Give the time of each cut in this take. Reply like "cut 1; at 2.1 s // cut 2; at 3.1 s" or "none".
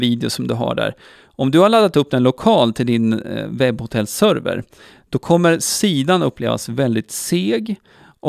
none

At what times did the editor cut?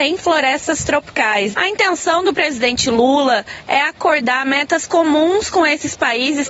cut 1; at 1.5 s

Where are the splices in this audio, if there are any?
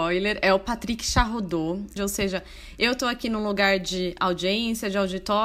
cut 1; at 2.0 s

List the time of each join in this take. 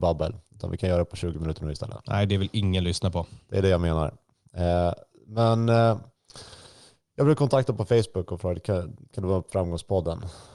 none

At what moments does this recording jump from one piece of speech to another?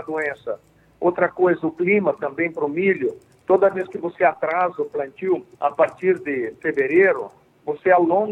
cut 1; at 5.5 s

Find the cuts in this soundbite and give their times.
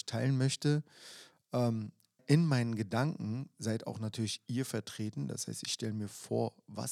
none

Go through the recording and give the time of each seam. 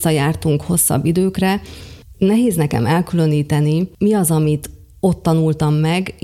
none

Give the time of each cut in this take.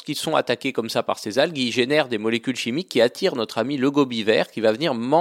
none

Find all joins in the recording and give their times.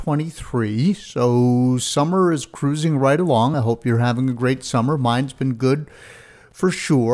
none

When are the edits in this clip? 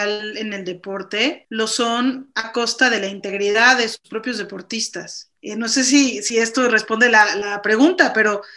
cut 1; at 5.3 s

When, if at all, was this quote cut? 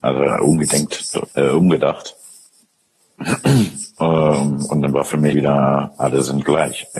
cut 1; at 1.3 s // cut 2; at 5.3 s

